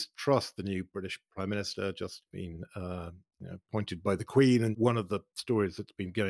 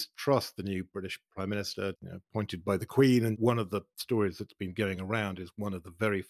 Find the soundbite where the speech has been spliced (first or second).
second